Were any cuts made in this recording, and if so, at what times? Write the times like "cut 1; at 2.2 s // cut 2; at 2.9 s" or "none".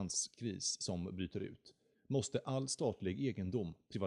cut 1; at 1.9 s